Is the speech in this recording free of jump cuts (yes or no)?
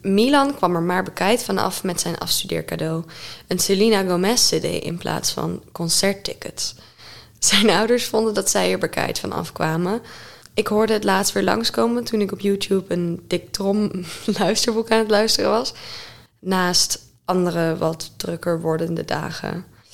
no